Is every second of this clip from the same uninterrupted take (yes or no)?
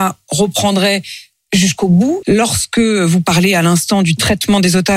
no